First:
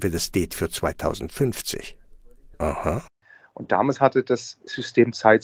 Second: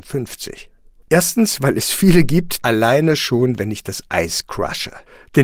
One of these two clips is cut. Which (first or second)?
second